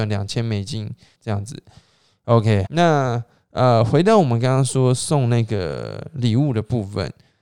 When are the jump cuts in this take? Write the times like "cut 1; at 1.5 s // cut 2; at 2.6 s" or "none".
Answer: cut 1; at 1.1 s // cut 2; at 2.7 s